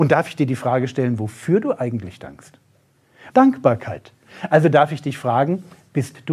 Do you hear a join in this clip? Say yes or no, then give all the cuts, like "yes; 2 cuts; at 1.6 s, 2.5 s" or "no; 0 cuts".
yes; 1 cut; at 3.3 s